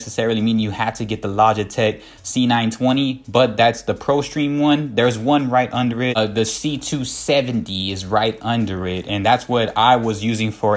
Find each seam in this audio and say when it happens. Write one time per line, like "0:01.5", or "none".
none